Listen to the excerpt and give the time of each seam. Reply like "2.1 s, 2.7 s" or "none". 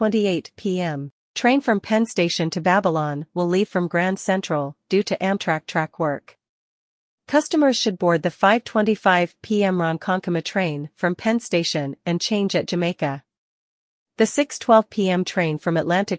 none